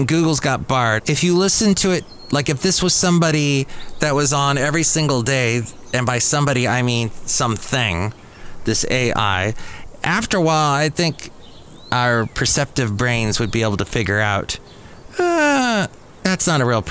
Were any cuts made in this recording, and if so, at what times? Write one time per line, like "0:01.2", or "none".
0:01.0

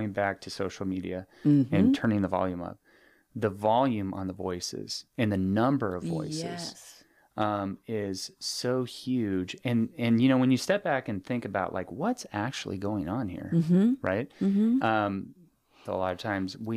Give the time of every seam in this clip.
0:15.8

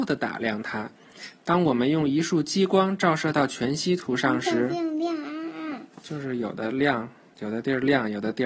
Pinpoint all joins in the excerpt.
0:01.4

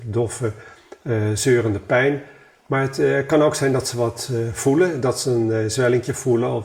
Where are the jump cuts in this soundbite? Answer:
none

